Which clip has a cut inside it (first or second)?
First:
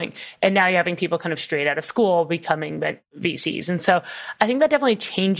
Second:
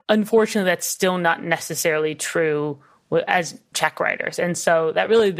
second